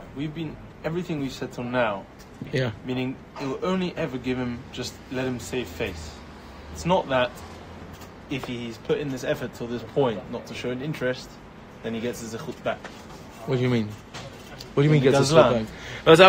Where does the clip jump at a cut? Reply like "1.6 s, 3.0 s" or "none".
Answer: none